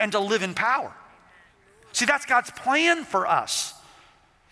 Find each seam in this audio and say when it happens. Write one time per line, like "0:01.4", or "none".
none